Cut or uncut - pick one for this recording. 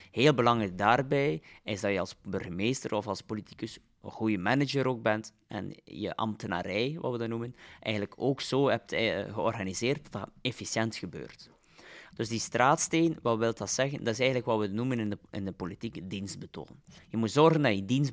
cut